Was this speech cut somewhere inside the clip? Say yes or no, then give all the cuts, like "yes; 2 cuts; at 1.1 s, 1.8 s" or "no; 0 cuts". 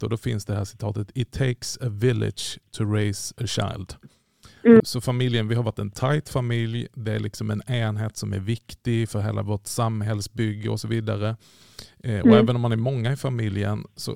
yes; 1 cut; at 4.8 s